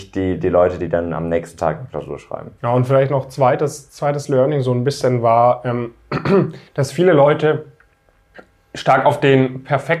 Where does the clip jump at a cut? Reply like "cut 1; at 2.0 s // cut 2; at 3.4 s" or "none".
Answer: cut 1; at 2.6 s // cut 2; at 6.7 s